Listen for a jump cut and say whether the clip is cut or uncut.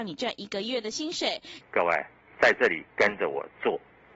cut